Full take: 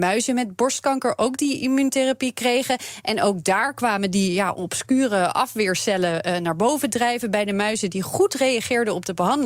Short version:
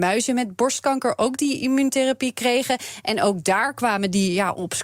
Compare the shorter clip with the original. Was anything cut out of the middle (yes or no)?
no